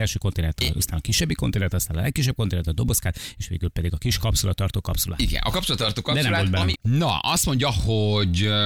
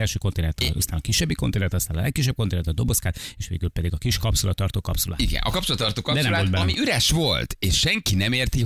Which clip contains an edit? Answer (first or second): first